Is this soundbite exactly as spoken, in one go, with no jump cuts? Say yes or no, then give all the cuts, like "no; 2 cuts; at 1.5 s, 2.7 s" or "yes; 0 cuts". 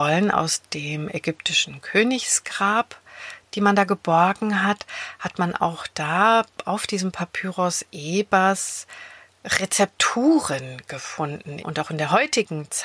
no; 1 cut; at 11.6 s